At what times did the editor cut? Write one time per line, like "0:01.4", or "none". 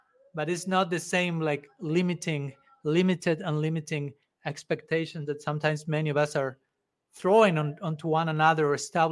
none